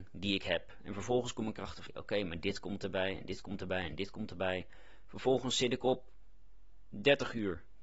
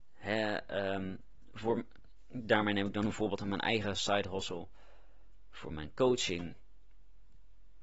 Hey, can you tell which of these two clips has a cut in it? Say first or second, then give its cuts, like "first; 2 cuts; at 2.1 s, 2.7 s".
first; 1 cut; at 1.9 s